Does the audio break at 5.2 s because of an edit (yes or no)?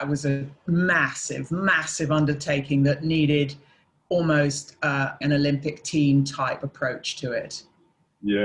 yes